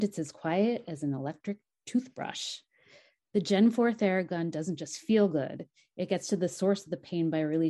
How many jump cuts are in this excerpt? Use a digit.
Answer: 0